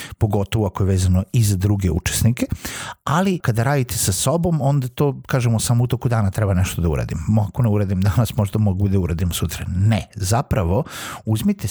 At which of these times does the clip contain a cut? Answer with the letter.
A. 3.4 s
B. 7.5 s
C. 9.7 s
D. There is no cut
A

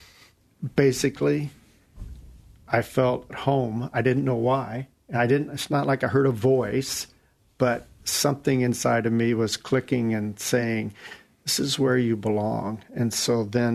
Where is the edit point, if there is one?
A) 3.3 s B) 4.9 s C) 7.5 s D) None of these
A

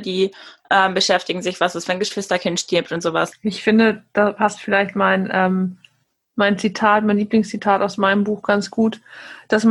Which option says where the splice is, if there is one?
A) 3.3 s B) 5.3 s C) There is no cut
A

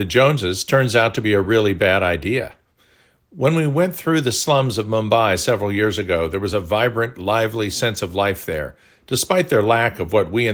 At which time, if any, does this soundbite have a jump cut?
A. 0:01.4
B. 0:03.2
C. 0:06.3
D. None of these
D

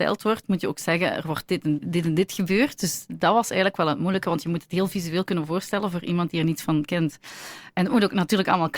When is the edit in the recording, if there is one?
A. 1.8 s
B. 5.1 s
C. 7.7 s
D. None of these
A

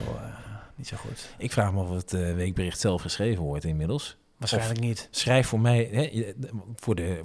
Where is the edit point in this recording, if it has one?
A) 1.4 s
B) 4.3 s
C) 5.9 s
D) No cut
D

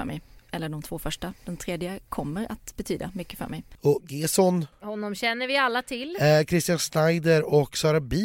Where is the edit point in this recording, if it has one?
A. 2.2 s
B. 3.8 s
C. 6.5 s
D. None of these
B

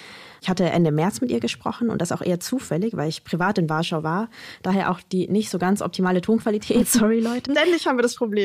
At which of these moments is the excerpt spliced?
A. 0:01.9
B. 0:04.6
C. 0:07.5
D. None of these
C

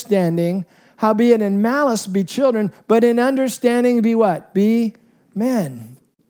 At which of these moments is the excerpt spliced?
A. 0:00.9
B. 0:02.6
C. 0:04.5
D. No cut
D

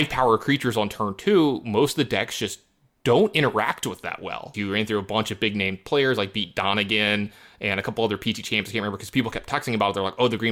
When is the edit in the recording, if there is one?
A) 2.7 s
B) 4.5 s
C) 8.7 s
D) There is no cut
B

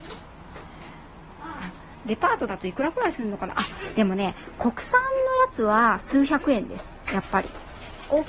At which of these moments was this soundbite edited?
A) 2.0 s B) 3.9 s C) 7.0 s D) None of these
D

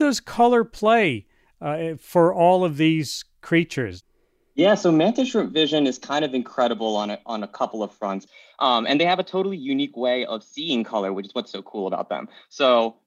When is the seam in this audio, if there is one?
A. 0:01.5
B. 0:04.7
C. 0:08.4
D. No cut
D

